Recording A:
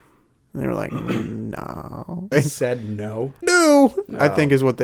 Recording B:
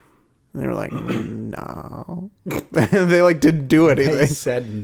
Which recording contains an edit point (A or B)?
A